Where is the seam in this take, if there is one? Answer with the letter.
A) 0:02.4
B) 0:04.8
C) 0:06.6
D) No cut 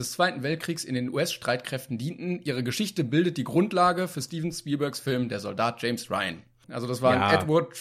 C